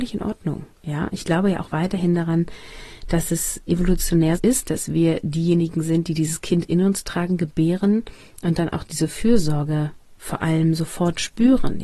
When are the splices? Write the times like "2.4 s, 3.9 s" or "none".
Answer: 4.4 s